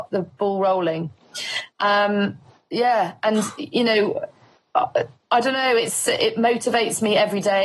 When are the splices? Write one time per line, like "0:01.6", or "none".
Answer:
none